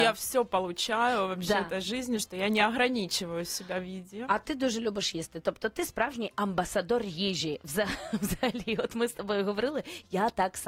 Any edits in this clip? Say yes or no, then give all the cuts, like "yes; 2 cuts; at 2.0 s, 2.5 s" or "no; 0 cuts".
no; 0 cuts